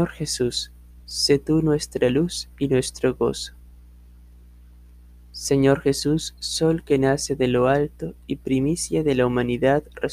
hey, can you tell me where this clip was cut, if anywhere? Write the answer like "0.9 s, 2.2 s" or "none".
1.0 s